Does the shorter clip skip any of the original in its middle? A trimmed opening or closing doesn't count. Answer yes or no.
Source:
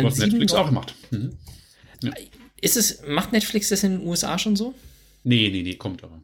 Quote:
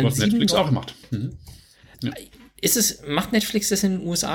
no